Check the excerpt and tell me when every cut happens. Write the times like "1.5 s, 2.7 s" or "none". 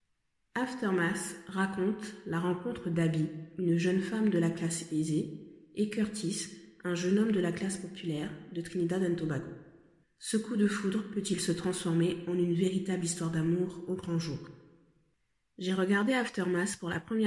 10.0 s